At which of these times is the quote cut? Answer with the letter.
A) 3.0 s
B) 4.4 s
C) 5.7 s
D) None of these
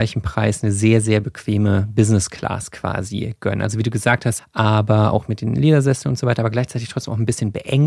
B